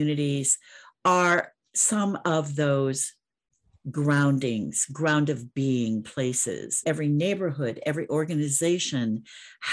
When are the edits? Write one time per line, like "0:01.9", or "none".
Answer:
0:06.8